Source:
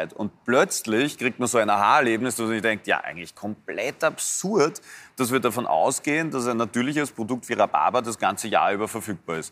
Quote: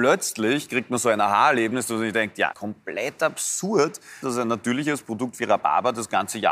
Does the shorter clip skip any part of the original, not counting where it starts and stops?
yes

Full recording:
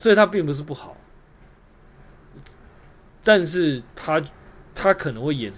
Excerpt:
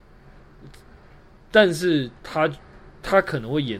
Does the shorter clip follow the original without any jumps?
yes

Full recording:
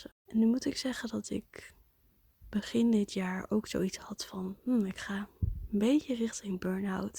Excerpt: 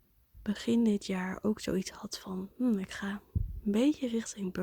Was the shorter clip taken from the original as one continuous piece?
yes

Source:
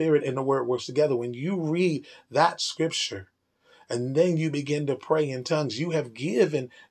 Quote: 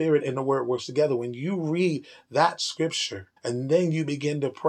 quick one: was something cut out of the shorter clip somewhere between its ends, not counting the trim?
yes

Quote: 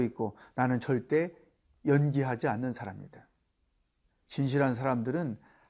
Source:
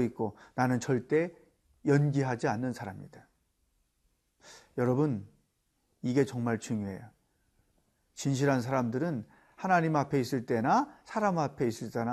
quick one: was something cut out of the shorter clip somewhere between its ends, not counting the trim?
yes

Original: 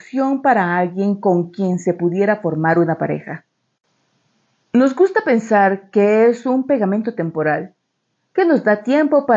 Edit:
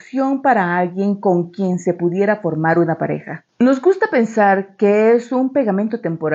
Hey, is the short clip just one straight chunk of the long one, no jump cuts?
no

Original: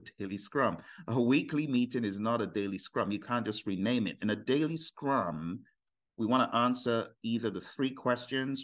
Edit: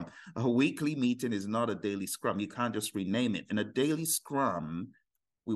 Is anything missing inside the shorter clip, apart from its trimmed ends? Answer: no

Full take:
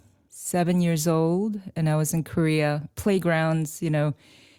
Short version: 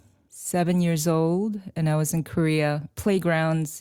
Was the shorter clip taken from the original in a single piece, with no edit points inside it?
yes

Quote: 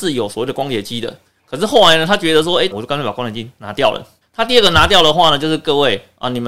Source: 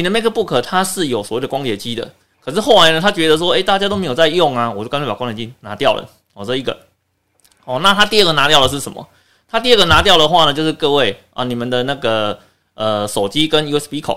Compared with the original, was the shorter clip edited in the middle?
yes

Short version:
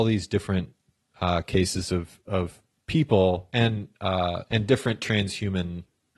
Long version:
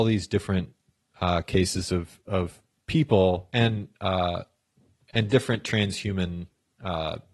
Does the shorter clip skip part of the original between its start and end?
yes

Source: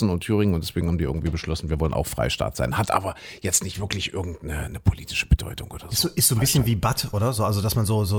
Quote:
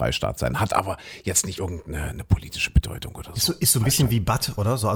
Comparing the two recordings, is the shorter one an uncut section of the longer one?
no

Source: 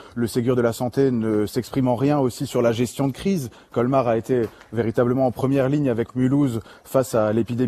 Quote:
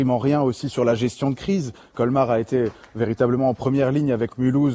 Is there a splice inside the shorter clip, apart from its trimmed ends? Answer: no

